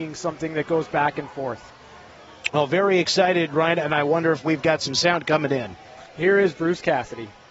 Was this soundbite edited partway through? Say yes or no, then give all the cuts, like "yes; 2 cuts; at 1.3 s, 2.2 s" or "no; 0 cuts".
no; 0 cuts